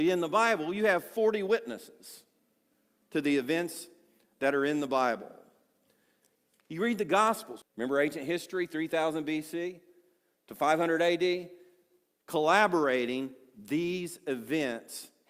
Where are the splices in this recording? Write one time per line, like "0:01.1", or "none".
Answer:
0:07.6